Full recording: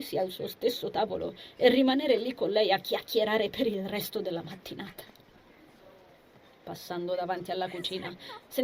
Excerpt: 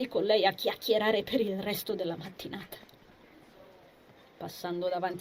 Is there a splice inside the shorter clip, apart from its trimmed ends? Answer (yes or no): no